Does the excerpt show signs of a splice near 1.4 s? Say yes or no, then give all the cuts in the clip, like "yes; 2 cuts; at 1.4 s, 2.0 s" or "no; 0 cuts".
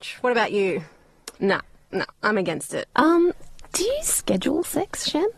yes; 2 cuts; at 1.4 s, 2.9 s